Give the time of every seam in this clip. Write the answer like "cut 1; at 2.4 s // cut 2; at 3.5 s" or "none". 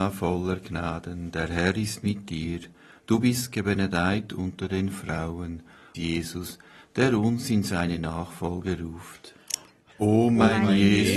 cut 1; at 5.9 s // cut 2; at 9.9 s